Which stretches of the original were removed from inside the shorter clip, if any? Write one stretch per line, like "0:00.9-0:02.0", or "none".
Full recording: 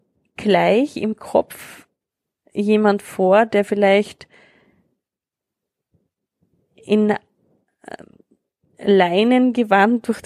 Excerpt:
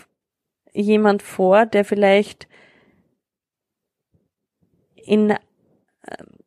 none